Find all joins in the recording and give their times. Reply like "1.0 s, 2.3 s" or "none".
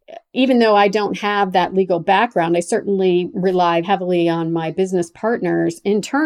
3.8 s

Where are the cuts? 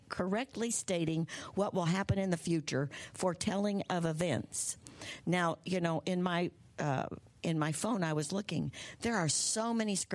none

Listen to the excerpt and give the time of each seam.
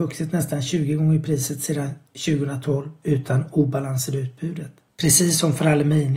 4.9 s

